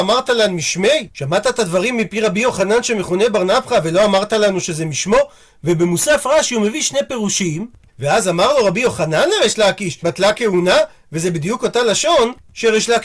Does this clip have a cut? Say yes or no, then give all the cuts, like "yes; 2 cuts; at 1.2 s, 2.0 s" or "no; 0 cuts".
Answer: yes; 2 cuts; at 7.9 s, 10.0 s